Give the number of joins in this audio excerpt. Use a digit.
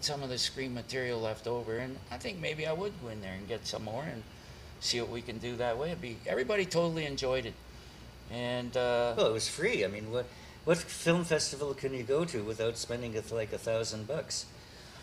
0